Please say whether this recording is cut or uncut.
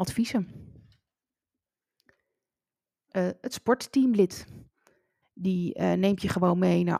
cut